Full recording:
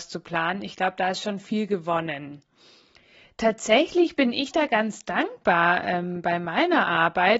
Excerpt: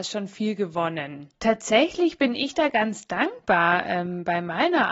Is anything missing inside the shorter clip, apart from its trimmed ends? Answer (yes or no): yes